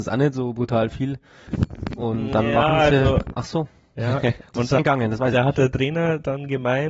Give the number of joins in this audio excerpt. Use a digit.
2